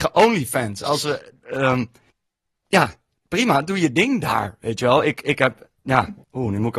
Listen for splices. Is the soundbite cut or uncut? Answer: uncut